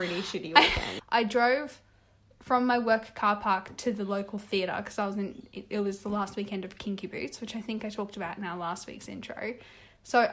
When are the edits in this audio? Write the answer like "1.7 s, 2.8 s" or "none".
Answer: 1.0 s